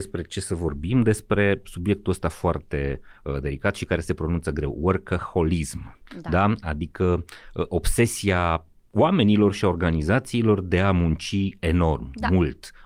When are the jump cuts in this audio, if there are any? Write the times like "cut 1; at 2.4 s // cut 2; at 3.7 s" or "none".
none